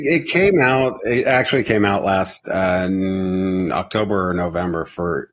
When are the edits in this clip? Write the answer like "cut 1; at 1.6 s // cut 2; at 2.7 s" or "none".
none